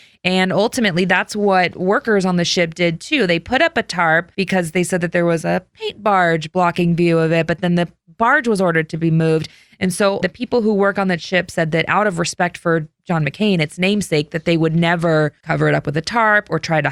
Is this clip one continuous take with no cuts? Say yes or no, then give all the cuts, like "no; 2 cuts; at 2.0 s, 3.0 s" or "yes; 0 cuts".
yes; 0 cuts